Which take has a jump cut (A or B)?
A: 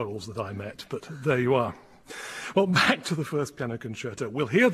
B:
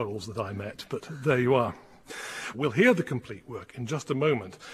B